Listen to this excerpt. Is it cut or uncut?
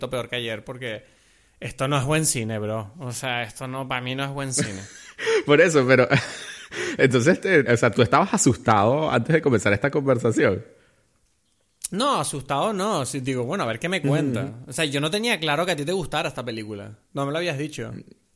cut